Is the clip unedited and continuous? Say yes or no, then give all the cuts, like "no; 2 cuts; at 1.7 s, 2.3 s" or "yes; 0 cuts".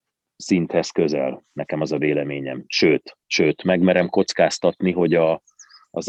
yes; 0 cuts